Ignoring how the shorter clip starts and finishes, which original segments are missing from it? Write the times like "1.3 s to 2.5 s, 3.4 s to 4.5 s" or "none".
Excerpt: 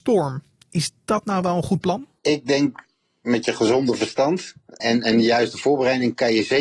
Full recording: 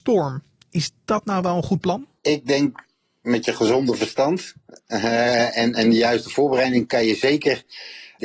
4.8 s to 5.5 s